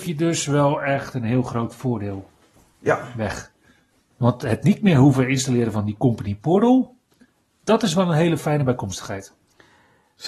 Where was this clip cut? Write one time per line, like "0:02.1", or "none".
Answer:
none